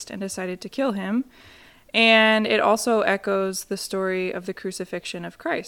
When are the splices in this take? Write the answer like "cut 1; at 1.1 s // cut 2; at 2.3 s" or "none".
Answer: none